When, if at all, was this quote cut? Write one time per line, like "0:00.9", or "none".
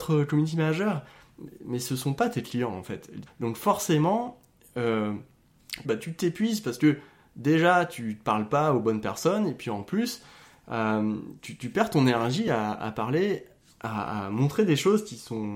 0:03.3
0:05.8